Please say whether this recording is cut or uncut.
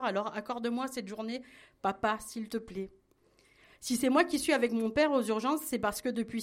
uncut